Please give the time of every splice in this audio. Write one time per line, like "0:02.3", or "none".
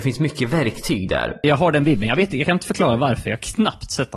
0:01.4